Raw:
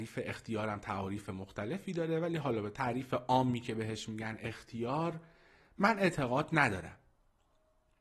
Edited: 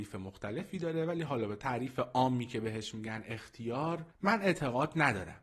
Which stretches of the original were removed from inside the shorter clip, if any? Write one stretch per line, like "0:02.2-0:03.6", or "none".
0:05.3-0:05.7